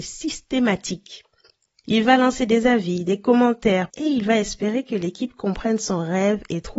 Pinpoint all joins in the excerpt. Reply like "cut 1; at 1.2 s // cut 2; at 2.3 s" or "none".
cut 1; at 1.8 s // cut 2; at 3.9 s